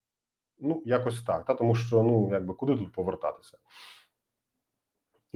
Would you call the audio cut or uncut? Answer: uncut